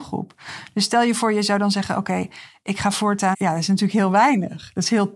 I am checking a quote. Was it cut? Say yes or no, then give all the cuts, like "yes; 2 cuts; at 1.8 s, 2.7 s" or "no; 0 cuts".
yes; 1 cut; at 3.3 s